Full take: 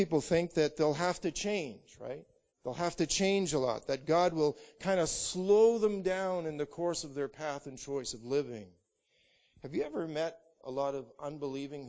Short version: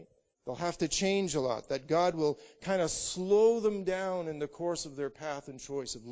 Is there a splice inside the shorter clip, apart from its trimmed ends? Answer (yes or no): no